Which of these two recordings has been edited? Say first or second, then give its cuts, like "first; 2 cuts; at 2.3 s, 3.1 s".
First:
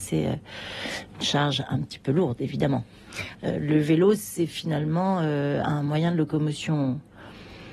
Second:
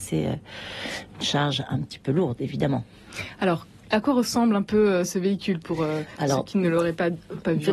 first; 1 cut; at 3.3 s